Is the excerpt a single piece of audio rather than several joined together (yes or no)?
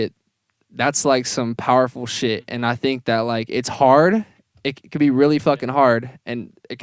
yes